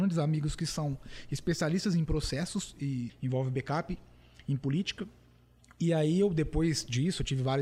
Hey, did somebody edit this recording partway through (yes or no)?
yes